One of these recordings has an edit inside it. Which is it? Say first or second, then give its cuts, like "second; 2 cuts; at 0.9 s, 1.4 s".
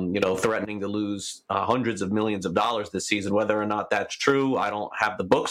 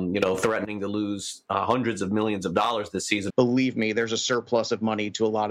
second; 1 cut; at 3.3 s